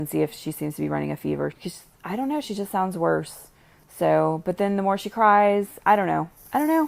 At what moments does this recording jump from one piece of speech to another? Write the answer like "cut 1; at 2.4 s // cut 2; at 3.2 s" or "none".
cut 1; at 1.5 s